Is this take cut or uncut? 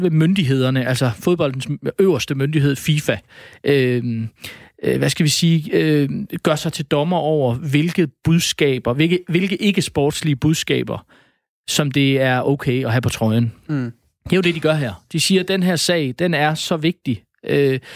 uncut